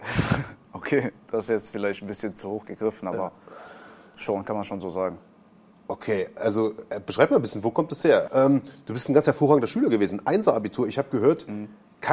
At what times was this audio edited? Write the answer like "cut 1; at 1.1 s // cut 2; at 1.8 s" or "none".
cut 1; at 8.3 s